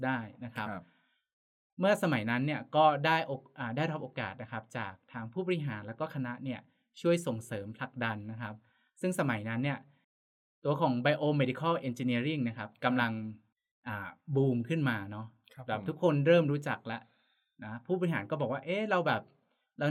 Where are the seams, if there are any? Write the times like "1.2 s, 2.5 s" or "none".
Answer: none

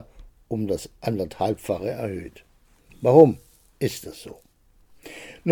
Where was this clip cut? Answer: none

